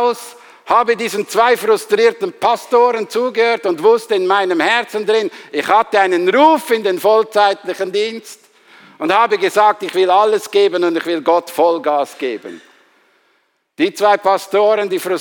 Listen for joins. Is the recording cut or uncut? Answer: uncut